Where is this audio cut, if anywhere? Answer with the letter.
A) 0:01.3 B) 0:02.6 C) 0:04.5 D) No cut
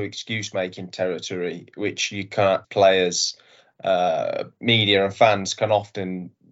B